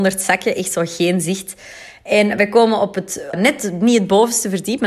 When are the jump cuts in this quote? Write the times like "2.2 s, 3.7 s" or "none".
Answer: 3.3 s